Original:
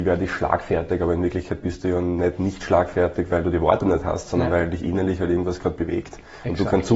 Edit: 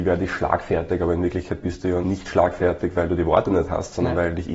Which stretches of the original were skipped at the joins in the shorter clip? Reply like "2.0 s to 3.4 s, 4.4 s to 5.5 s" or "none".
2.0 s to 2.4 s